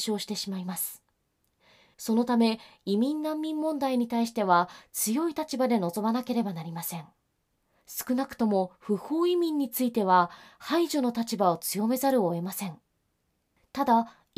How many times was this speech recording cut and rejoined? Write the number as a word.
zero